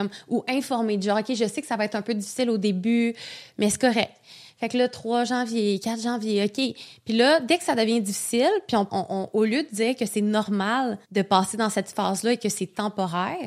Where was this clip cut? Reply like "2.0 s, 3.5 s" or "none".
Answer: 8.9 s, 11.0 s

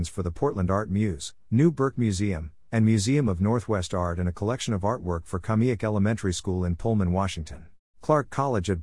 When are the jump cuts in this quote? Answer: 7.8 s

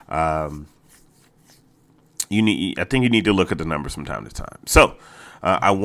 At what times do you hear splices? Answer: none

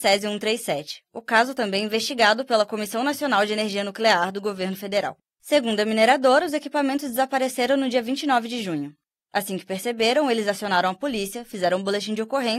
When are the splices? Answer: none

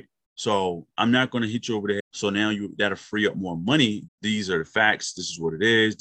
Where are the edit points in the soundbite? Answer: 2.0 s, 4.1 s

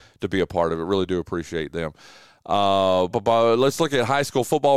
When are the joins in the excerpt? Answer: 3.1 s

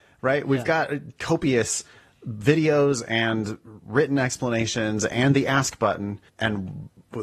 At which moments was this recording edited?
6.3 s

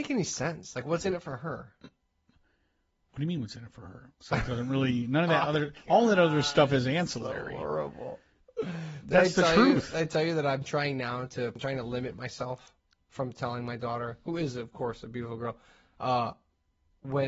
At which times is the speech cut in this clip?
4.1 s

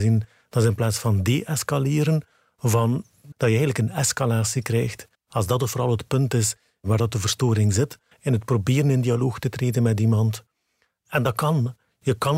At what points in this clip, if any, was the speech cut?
3.3 s, 5.1 s, 8.1 s

